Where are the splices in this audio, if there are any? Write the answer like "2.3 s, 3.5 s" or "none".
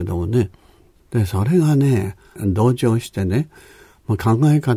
1.0 s, 2.4 s